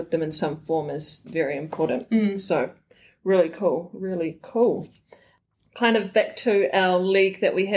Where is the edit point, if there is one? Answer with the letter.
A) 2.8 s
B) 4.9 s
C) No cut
C